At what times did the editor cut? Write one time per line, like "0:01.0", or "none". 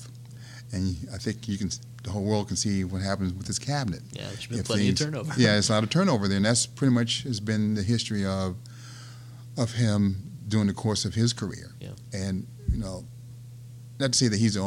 none